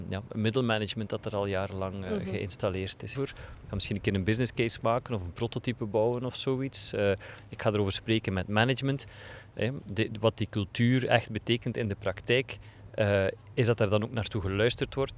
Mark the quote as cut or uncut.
cut